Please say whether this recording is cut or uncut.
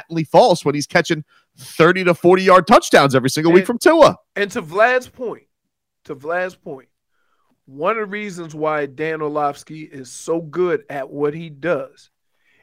uncut